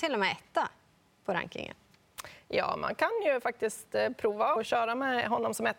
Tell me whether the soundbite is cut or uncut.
cut